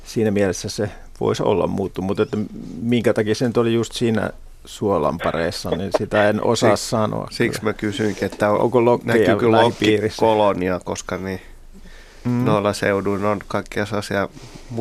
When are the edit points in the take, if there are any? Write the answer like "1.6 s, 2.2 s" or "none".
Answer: none